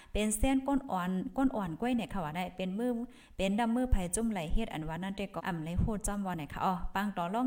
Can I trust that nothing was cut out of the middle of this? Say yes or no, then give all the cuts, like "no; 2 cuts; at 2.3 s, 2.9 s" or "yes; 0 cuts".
no; 1 cut; at 5.4 s